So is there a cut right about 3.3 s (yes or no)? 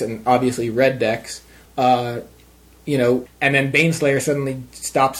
yes